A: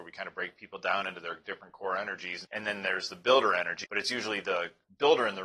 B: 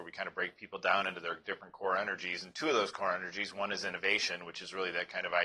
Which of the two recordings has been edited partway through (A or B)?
A